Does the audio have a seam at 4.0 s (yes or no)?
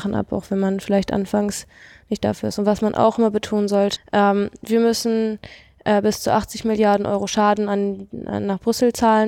yes